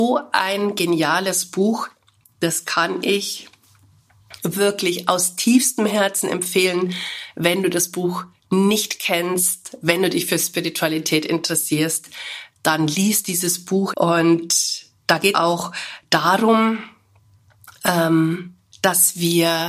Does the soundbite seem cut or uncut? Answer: cut